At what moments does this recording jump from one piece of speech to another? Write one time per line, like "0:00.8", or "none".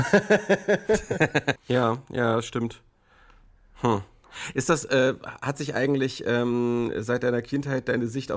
0:01.6